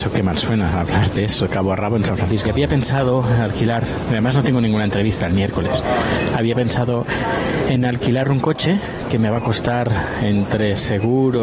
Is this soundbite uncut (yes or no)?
no